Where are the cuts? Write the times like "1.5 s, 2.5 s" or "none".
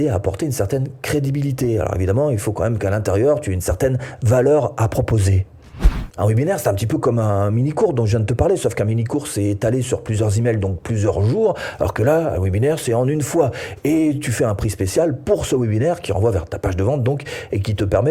6.2 s

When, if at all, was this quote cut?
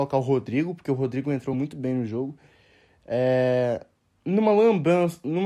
none

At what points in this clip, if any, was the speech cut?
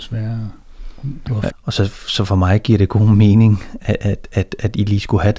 1.5 s

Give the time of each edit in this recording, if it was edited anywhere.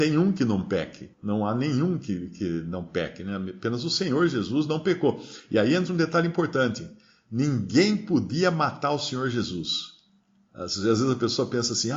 1.1 s

